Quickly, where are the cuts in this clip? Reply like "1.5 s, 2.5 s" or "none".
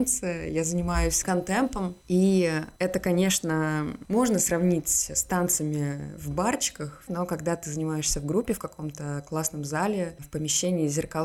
7.1 s